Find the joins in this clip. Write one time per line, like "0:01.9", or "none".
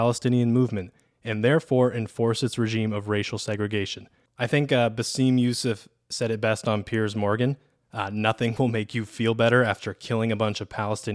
0:04.3